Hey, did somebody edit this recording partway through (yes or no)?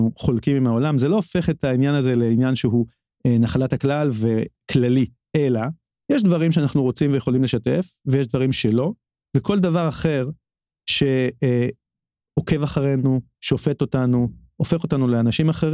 yes